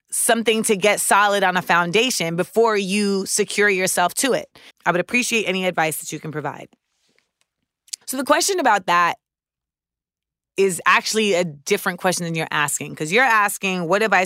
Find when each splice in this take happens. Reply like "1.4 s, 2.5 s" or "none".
4.7 s, 8.0 s